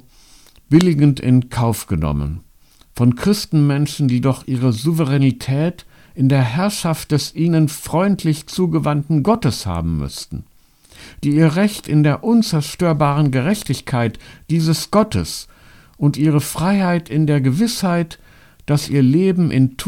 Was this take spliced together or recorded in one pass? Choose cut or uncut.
uncut